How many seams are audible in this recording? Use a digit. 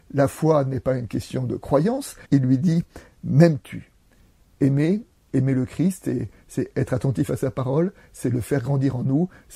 1